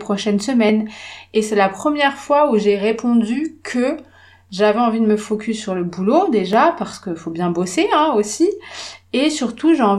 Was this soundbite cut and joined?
no; 0 cuts

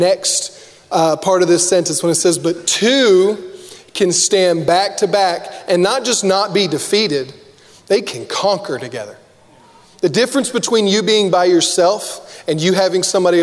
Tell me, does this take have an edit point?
no; 0 cuts

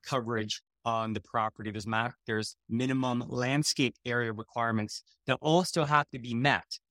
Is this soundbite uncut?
yes; 0 cuts

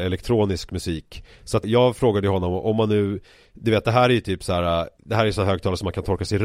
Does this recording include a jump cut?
yes; 2 cuts; at 1.6 s, 5.0 s

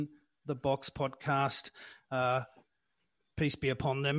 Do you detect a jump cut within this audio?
no; 0 cuts

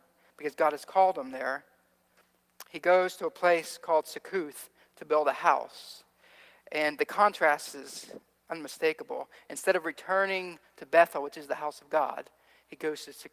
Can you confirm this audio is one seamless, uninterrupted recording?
yes; 0 cuts

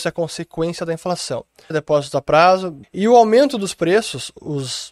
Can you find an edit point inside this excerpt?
yes; 2 cuts; at 1.7 s, 2.8 s

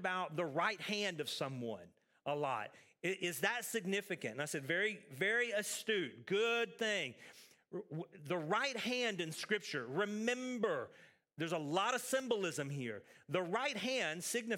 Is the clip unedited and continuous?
yes; 0 cuts

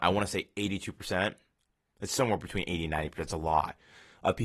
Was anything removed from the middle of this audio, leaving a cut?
no; 0 cuts

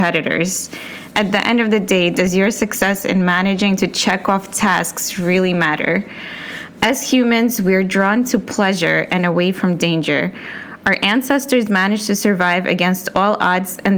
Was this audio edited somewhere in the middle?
yes; 1 cut; at 1.1 s

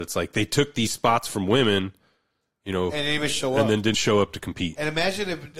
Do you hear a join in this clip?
yes; 1 cut; at 3.9 s

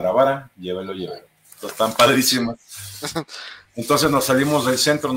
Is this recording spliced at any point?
no; 0 cuts

